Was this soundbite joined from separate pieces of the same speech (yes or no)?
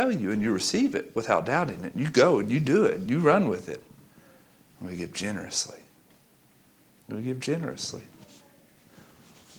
no